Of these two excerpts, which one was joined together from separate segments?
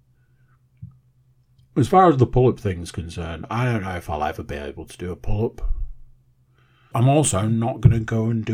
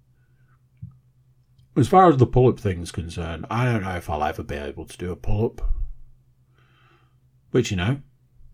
first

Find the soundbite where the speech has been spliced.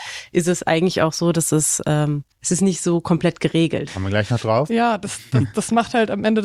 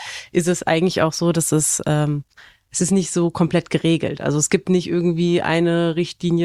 first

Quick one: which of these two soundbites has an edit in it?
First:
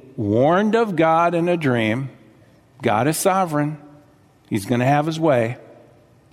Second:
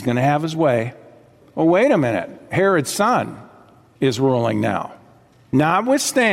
second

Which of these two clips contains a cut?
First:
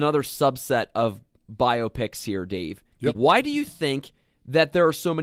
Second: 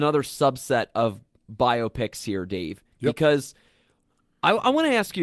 first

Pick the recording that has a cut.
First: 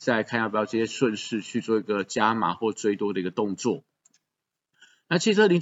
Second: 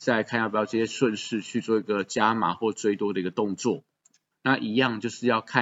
second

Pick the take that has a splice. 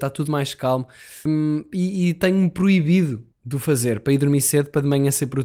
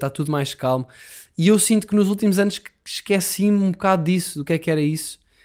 first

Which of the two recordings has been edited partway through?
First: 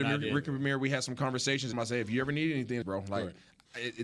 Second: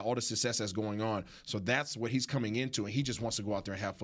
first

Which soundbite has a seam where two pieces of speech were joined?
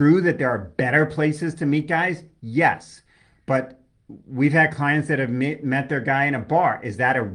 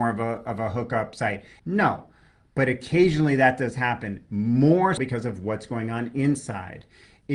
second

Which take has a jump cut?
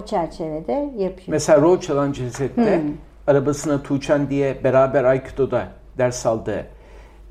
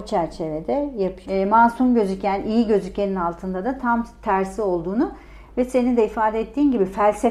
second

